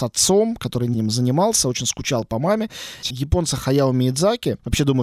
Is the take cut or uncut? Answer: cut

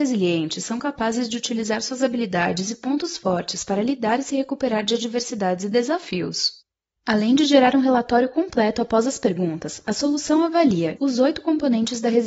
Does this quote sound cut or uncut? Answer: cut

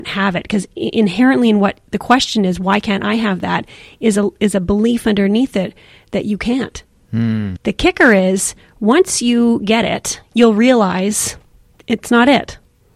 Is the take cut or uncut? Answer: cut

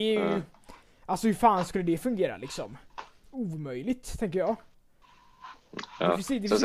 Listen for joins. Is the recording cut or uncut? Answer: uncut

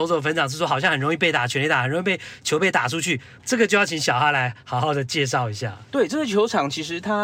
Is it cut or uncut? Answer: cut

